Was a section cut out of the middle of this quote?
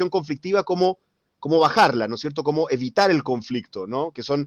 no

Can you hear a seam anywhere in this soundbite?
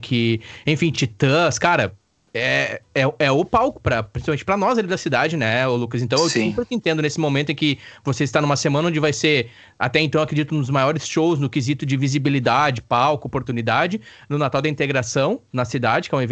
no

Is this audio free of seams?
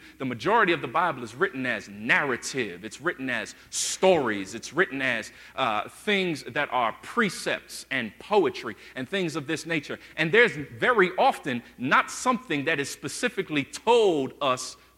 yes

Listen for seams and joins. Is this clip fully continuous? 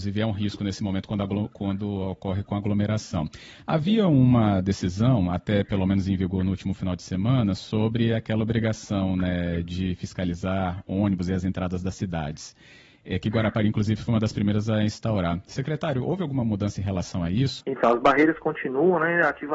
no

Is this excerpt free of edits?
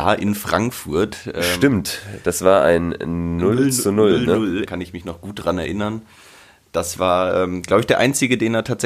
no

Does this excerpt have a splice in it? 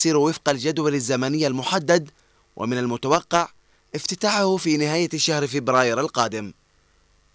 no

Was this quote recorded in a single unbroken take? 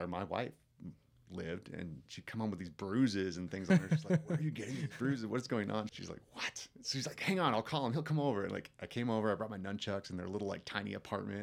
no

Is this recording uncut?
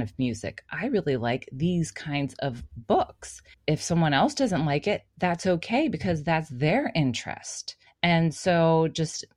yes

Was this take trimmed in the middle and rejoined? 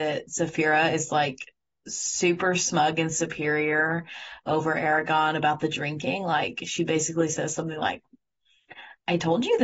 no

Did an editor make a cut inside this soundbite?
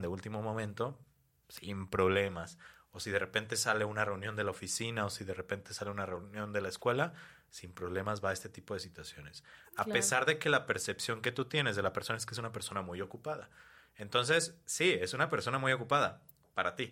no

